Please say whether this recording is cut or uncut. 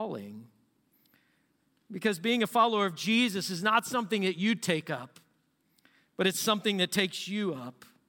uncut